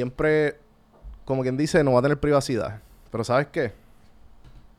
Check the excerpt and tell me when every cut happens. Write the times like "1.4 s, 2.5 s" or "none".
none